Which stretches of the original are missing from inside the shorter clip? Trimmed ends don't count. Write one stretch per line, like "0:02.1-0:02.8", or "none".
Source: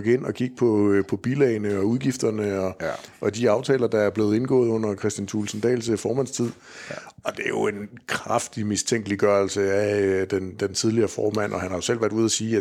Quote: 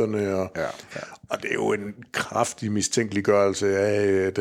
0:03.2-0:06.8